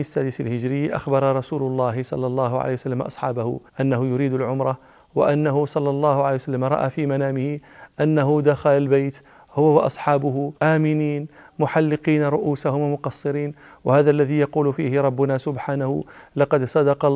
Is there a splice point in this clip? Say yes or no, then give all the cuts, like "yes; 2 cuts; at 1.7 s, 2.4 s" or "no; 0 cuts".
yes; 2 cuts; at 3.7 s, 10.6 s